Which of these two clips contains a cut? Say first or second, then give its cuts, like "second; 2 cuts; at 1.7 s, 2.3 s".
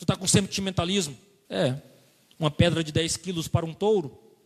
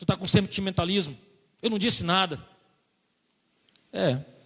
first; 1 cut; at 1.5 s